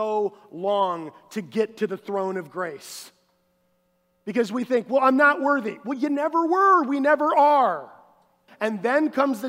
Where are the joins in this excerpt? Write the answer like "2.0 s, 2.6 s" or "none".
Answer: 8.5 s